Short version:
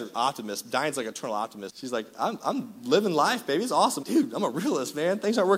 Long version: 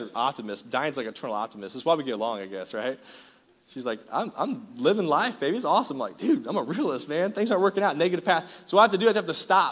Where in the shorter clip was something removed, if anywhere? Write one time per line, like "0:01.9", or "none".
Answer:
0:01.7
0:04.0